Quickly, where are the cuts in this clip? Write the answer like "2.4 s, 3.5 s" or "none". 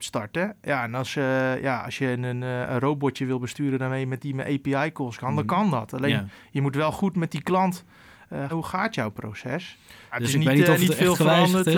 8.5 s, 10.1 s